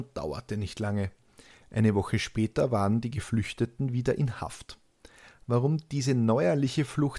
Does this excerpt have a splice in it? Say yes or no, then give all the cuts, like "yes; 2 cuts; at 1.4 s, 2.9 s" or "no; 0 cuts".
no; 0 cuts